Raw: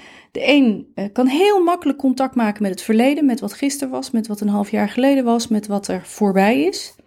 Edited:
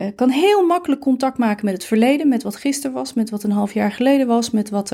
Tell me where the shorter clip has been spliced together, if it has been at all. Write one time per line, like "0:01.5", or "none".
none